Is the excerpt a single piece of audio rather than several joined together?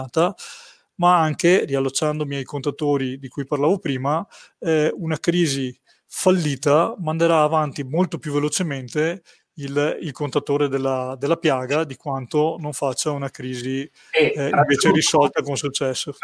yes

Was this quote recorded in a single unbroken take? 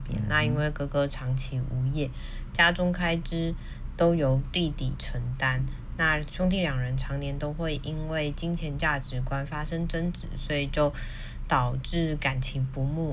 yes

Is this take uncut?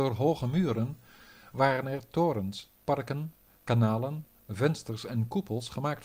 no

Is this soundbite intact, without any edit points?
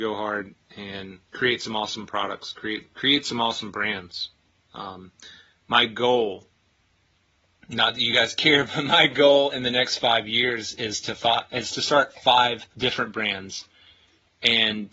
no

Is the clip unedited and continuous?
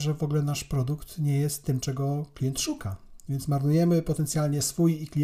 yes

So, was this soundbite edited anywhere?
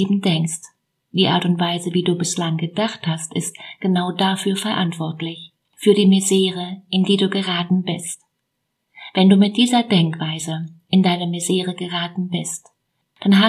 no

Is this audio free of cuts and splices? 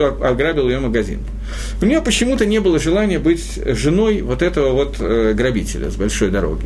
yes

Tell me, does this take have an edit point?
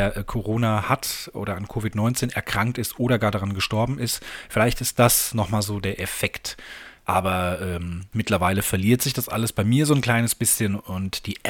yes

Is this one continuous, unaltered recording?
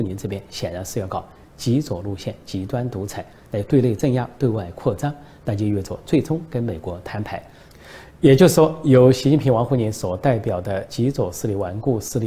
yes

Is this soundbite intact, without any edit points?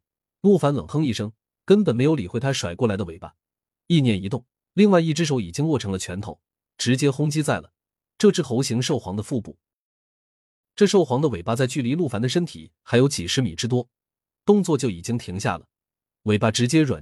yes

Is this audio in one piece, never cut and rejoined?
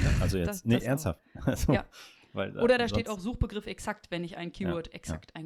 yes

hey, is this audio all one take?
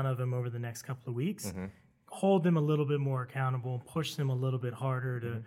yes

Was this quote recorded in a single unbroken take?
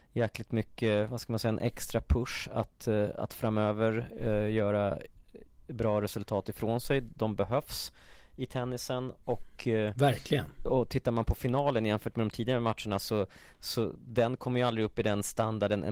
yes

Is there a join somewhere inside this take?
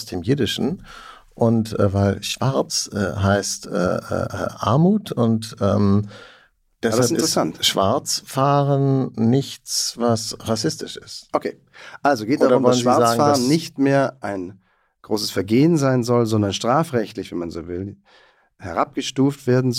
no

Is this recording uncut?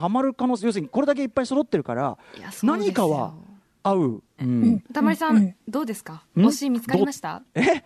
no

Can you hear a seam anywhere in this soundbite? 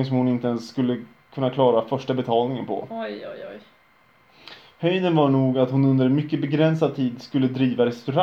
no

